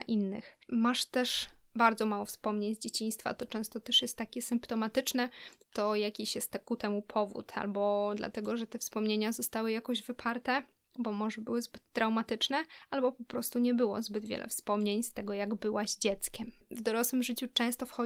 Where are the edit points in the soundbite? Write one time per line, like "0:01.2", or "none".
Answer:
0:05.6